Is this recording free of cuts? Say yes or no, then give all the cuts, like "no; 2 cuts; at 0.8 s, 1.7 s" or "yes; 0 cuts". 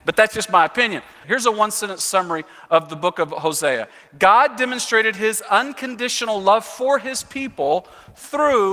no; 1 cut; at 1.2 s